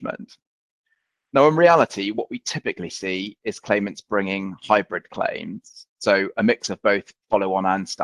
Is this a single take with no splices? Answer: yes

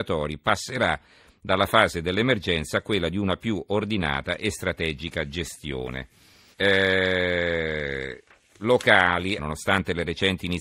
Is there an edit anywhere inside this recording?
yes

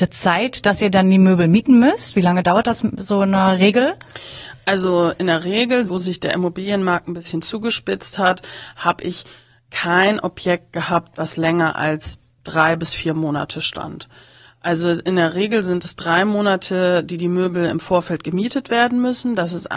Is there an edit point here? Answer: yes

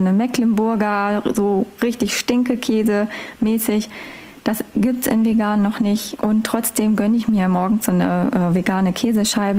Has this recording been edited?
yes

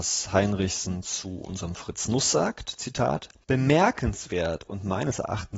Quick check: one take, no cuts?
yes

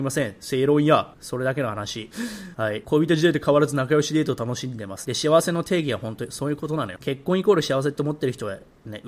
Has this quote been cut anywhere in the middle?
yes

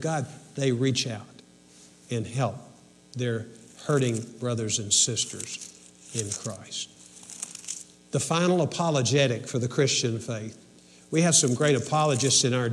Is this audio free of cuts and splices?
yes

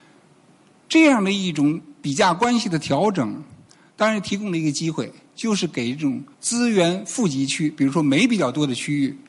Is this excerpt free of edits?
no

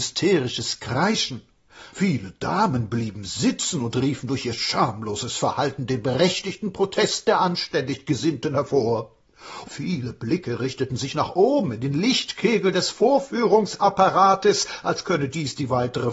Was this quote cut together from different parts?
yes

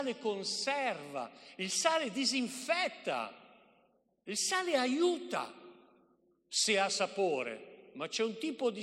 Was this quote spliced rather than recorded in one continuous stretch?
no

